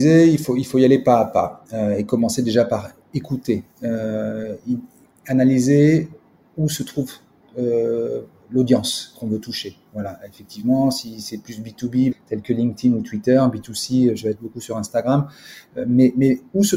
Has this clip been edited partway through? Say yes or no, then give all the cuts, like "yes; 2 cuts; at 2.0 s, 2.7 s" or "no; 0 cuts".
yes; 1 cut; at 12.1 s